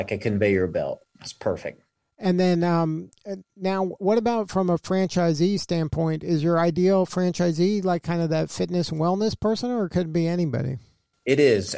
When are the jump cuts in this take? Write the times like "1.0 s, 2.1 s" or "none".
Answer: none